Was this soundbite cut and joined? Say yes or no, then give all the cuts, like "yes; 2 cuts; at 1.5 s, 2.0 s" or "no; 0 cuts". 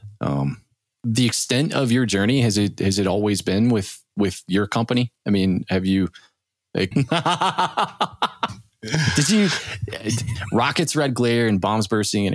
yes; 1 cut; at 6.9 s